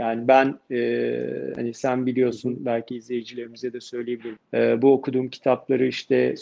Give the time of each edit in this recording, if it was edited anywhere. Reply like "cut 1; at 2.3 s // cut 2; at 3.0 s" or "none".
cut 1; at 4.4 s